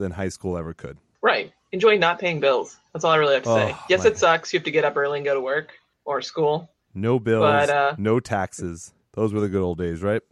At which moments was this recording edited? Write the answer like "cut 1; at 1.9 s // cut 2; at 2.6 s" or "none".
none